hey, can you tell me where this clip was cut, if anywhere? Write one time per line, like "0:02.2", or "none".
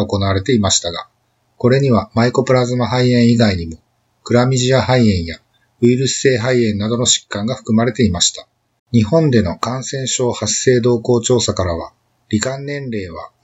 0:08.8
0:12.2